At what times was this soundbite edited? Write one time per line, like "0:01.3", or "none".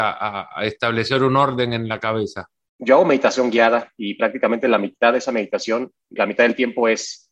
0:06.2